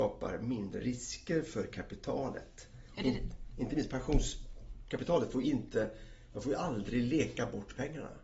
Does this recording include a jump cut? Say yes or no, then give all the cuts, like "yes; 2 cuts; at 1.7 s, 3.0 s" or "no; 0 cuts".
yes; 1 cut; at 2.9 s